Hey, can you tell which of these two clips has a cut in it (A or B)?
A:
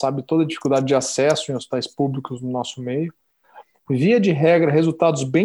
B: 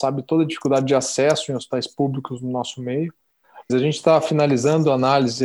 B